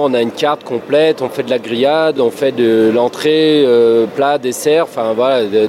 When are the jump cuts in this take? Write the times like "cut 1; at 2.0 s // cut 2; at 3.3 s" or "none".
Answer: none

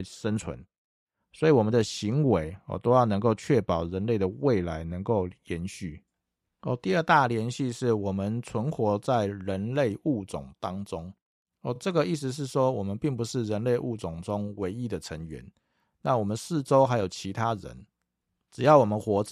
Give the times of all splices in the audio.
none

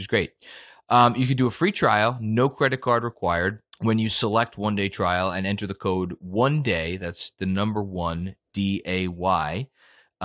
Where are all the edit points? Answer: cut 1; at 3.7 s

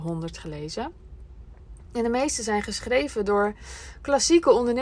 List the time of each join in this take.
none

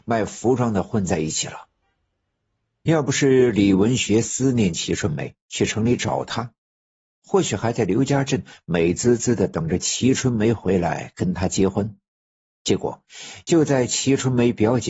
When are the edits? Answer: none

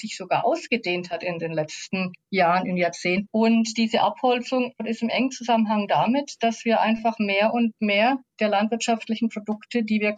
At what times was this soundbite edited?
cut 1; at 3.2 s

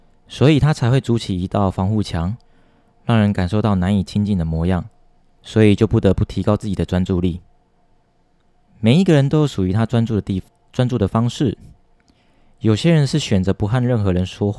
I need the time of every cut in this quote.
cut 1; at 5.4 s

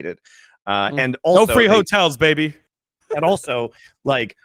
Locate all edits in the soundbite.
none

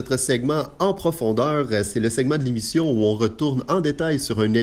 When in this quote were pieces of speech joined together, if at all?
none

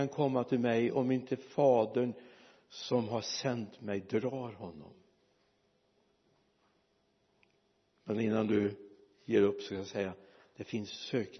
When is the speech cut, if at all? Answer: none

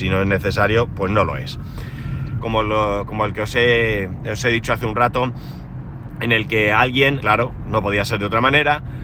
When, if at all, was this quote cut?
cut 1; at 2.4 s // cut 2; at 7.2 s

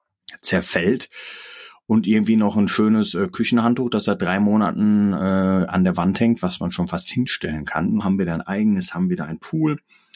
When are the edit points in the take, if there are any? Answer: cut 1; at 8.0 s

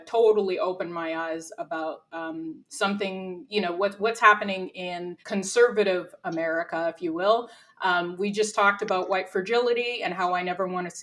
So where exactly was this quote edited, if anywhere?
cut 1; at 5.2 s

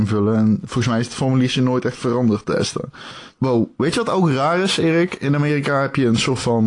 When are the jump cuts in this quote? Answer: cut 1; at 3.3 s

